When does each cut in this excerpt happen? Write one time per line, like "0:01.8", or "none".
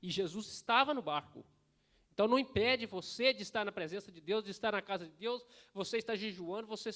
none